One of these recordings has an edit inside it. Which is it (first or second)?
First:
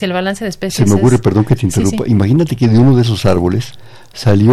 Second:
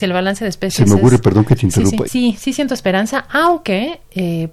second